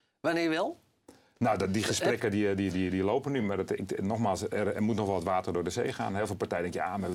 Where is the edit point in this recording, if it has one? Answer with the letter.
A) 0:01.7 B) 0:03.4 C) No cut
C